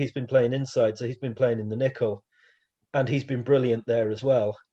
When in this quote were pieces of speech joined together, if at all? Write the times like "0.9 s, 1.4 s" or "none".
none